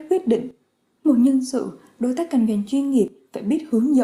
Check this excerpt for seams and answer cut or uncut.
cut